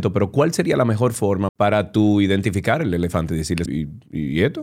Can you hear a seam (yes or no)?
yes